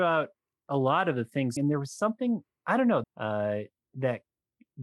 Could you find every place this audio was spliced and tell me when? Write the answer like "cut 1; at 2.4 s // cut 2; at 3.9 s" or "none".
cut 1; at 1.6 s // cut 2; at 3.0 s